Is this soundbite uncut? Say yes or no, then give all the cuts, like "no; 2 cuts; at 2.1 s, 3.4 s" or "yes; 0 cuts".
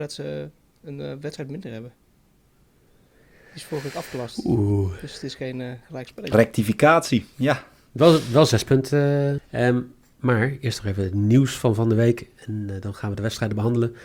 no; 2 cuts; at 6.3 s, 9.4 s